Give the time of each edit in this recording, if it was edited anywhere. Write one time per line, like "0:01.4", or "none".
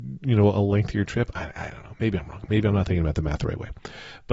none

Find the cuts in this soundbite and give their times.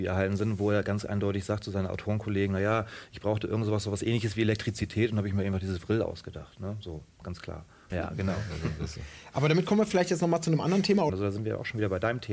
0:07.9
0:11.1

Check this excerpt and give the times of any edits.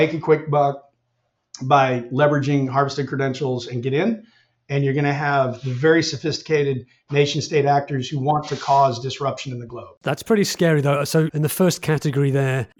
0:11.3

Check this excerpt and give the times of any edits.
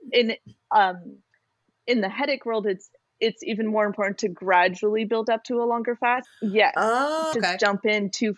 0:06.2
0:07.3

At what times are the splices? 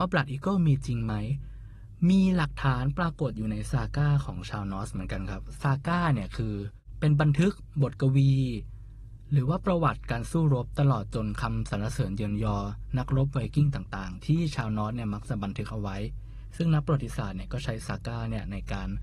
none

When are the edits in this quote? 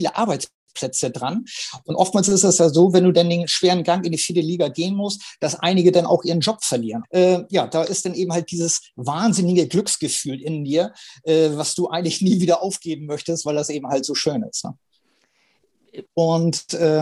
0:07.0
0:16.0

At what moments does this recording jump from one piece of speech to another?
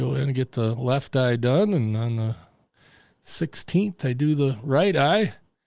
none

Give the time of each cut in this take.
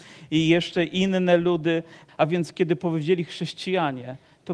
0:02.1

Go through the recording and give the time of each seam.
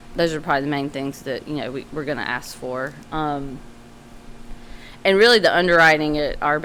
none

